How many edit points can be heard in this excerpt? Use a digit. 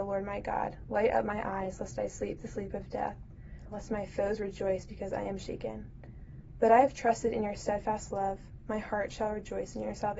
1